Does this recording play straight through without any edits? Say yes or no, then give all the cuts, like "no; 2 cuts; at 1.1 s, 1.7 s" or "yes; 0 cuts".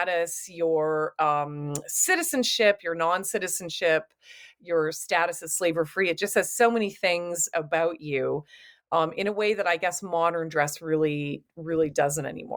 yes; 0 cuts